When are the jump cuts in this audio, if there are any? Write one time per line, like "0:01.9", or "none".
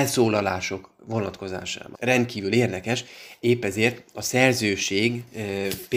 0:01.9